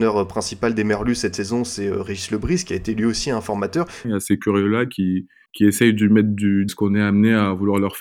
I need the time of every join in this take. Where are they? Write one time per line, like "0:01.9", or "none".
0:04.0
0:06.7

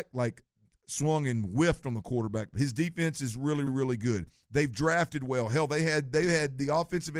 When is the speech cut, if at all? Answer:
0:02.5
0:03.7

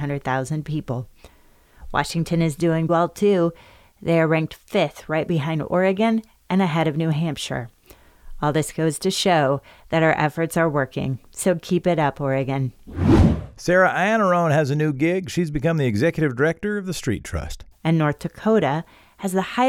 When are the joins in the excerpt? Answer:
0:02.9
0:17.7

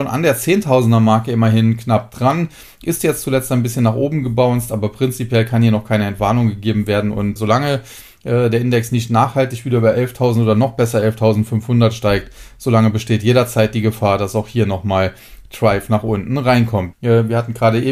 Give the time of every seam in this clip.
0:07.4
0:16.9

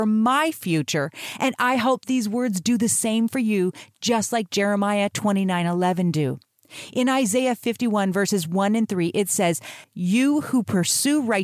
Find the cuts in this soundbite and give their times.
0:09.8

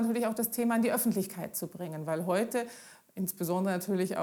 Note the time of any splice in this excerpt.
none

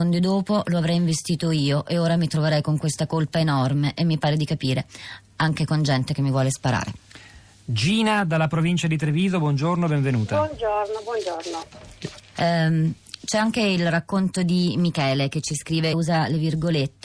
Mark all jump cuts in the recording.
0:12.4
0:15.9

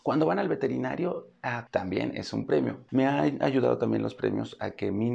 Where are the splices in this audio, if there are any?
0:01.7
0:02.9

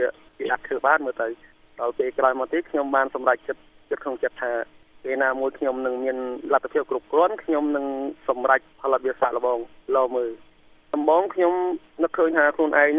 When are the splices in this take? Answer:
none

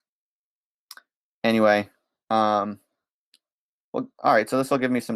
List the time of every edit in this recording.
none

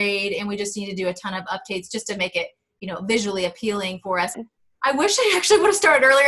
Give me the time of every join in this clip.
0:04.3

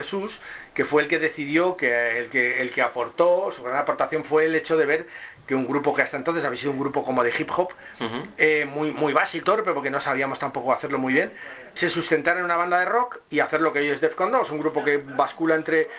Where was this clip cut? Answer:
0:09.4
0:11.8

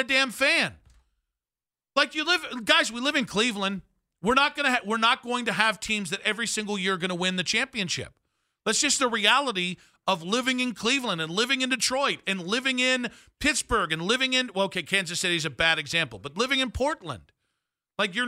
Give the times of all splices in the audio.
none

